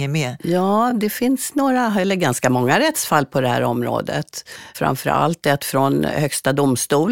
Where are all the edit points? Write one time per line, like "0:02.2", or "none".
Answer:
none